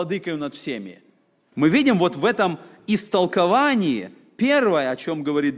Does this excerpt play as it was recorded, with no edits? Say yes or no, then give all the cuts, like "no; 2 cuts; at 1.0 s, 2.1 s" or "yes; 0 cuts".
no; 1 cut; at 1.5 s